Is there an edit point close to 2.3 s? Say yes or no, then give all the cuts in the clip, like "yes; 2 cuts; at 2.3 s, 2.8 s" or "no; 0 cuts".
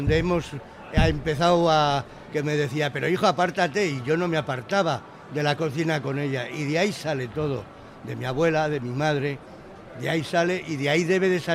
yes; 1 cut; at 2.3 s